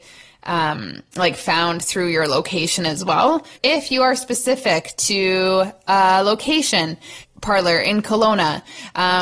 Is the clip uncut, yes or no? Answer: no